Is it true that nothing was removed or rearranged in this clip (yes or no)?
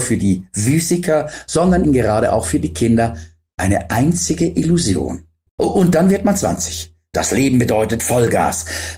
no